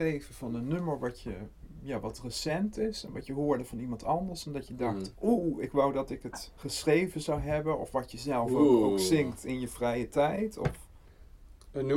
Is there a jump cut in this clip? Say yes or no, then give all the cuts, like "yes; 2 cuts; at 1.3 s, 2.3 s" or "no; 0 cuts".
no; 0 cuts